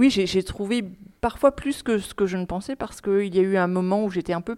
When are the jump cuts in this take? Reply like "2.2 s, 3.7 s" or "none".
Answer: 1.2 s

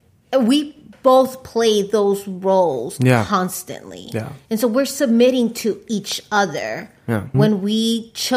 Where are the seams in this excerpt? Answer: 7.3 s

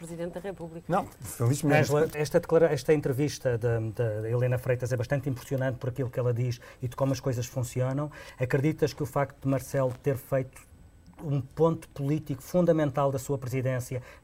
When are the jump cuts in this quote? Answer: 2.1 s

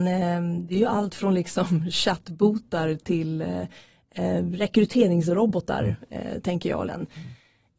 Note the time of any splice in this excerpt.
6.9 s

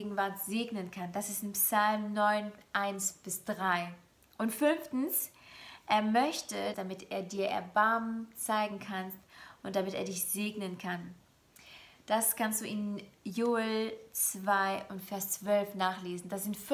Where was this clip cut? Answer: 6.7 s

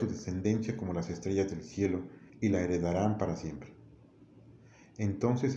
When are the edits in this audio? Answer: 2.3 s

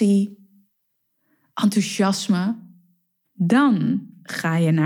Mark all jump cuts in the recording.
3.2 s

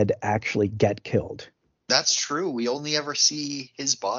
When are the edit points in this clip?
none

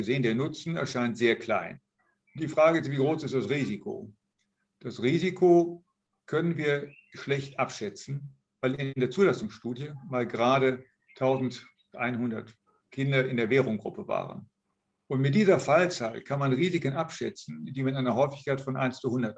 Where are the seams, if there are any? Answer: none

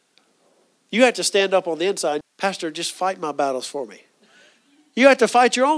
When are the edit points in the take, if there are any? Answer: 2.2 s

